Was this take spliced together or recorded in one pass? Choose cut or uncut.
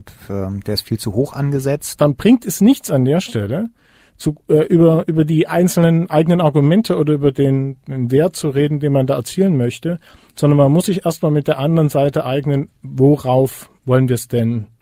cut